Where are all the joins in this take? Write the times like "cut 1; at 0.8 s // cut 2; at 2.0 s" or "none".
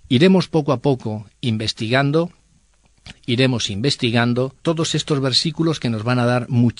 cut 1; at 3.1 s // cut 2; at 4.6 s